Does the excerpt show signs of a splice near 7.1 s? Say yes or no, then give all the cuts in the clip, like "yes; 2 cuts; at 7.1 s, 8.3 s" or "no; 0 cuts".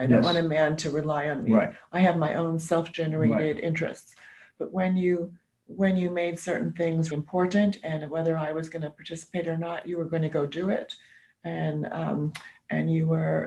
yes; 1 cut; at 7.1 s